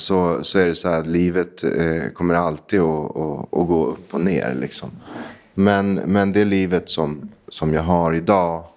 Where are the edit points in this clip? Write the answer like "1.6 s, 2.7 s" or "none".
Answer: none